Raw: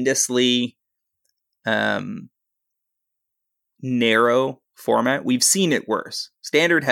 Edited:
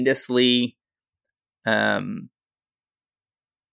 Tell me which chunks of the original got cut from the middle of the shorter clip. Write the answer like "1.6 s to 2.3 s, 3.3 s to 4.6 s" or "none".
none